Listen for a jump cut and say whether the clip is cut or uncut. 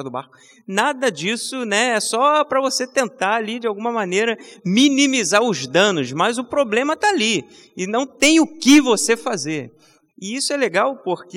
cut